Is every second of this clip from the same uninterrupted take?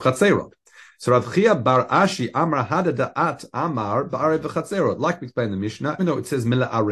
no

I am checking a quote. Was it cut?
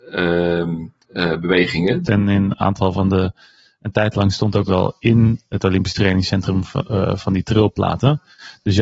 yes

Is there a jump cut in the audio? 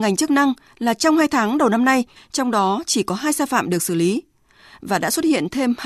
yes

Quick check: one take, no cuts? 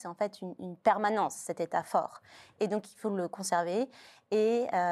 yes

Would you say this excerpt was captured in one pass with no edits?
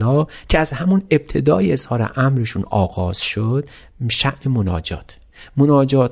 yes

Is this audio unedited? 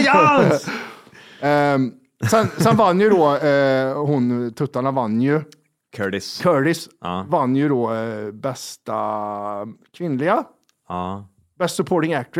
yes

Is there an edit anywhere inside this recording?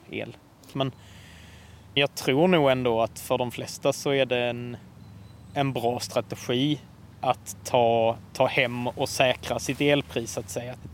no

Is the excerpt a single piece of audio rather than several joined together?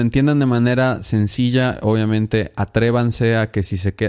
yes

